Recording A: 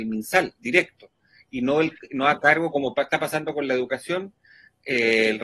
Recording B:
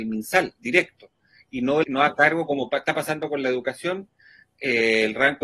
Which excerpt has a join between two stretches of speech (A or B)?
B